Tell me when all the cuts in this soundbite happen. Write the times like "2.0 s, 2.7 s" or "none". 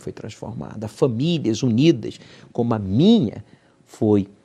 none